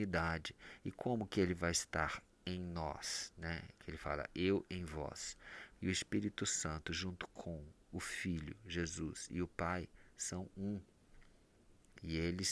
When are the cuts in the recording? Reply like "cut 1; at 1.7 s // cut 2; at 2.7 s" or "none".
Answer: cut 1; at 5.7 s